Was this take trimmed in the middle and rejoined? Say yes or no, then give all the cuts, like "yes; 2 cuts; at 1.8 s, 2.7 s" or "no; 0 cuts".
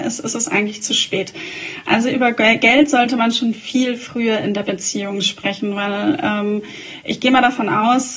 no; 0 cuts